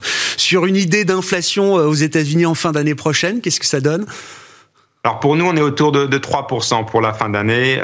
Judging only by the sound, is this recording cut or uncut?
uncut